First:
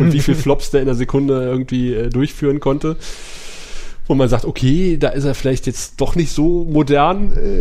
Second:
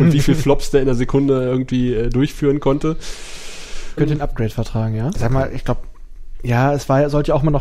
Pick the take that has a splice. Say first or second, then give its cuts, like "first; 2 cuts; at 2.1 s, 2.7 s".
second; 2 cuts; at 4.0 s, 5.1 s